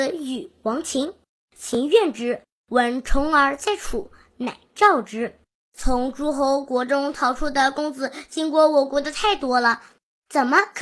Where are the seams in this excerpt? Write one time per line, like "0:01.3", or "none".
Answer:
0:05.7

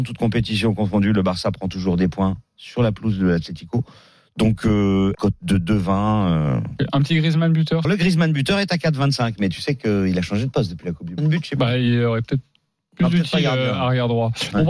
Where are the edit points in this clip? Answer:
0:05.1
0:07.8
0:11.2

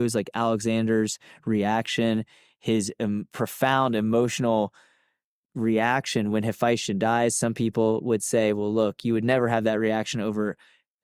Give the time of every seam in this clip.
none

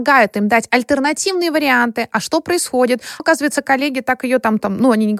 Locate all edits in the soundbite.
0:03.2

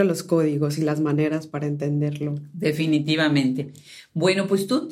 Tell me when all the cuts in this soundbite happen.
none

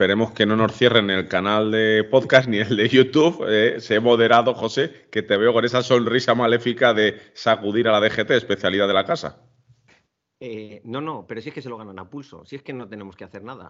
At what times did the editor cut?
none

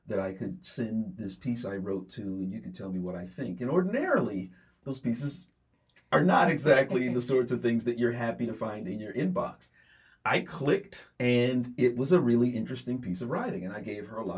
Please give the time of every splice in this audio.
0:11.1

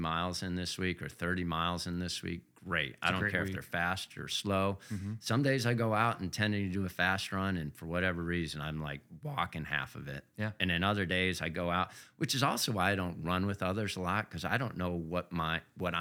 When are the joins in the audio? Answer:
none

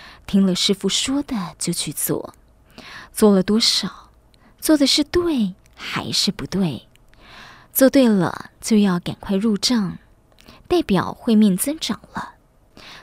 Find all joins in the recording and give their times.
none

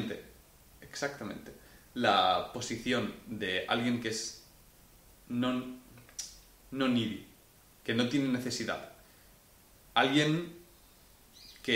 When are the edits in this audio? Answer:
none

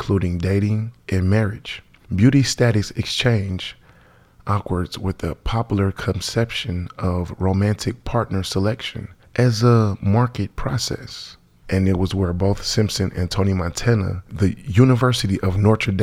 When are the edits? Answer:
0:11.6
0:14.3

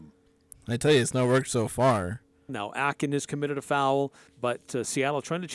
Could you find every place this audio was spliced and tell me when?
0:02.5
0:04.3

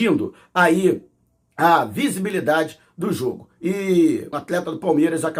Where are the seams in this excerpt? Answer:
0:04.3

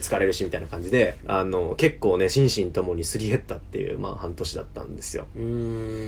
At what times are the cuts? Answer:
0:01.2

